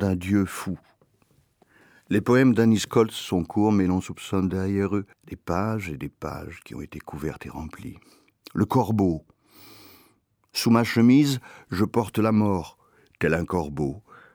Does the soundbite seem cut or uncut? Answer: uncut